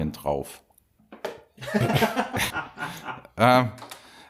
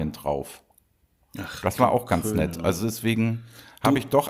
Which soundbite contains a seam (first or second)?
first